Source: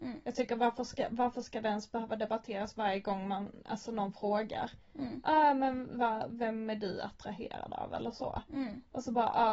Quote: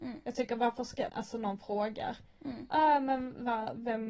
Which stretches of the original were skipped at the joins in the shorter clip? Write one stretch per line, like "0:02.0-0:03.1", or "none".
0:01.1-0:03.6